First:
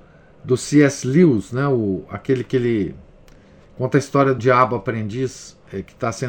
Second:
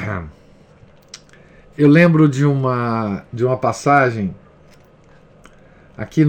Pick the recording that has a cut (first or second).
first